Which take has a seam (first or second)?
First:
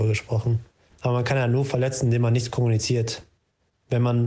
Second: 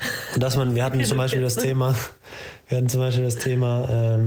first